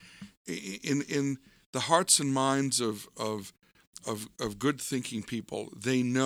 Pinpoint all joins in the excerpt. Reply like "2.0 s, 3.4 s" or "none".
none